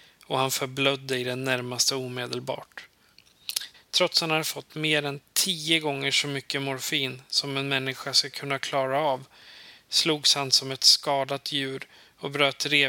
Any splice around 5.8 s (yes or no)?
no